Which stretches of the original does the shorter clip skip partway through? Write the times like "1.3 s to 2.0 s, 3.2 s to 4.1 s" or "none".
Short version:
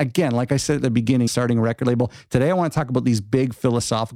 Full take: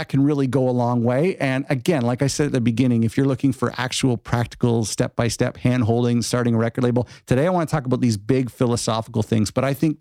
3.0 s to 6.2 s